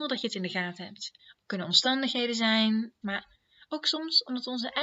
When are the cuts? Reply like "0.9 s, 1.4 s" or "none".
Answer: 1.2 s, 3.0 s